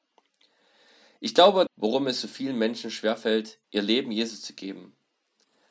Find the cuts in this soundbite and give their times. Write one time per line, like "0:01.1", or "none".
0:01.7
0:03.6